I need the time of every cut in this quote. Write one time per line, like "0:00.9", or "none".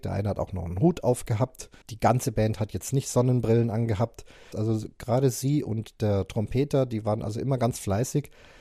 0:01.8
0:04.5